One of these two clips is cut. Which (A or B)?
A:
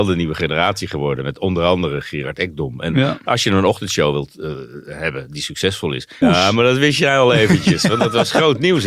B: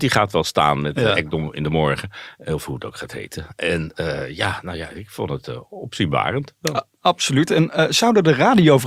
A